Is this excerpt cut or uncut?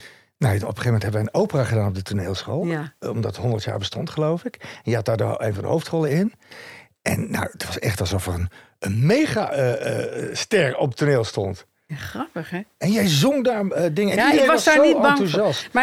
uncut